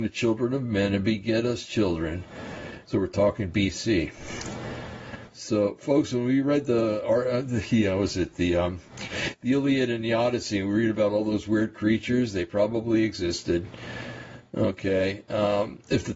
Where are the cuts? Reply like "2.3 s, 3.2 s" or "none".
2.8 s, 5.3 s

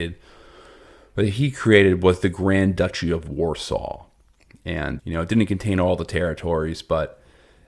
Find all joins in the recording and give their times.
5.0 s

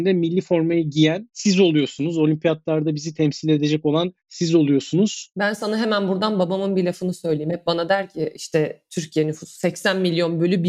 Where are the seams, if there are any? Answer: 5.3 s

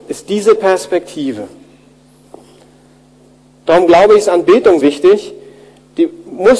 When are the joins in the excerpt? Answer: 4.8 s

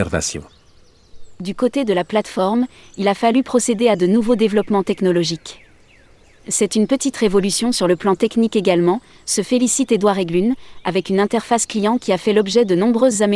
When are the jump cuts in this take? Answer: none

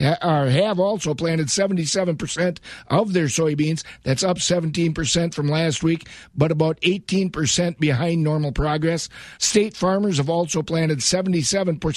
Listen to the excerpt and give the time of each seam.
9.4 s

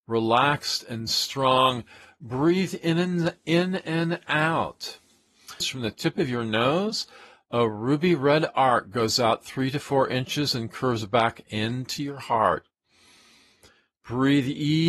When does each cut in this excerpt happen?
5.6 s

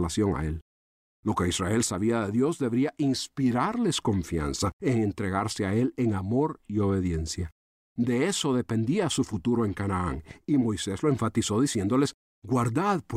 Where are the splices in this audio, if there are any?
none

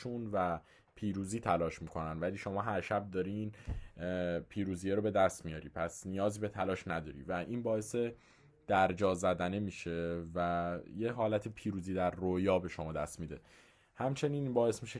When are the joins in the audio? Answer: none

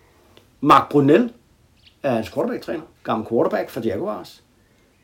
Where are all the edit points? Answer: 3.0 s

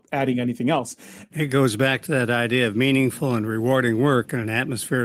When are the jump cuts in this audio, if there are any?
1.3 s

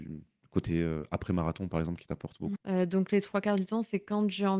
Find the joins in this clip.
2.6 s

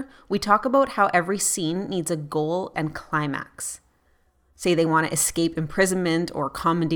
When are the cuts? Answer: 2.7 s, 4.5 s

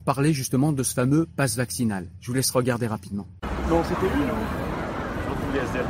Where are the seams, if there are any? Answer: none

